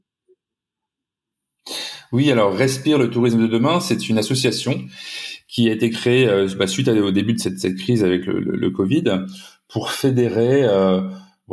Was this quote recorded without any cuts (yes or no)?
yes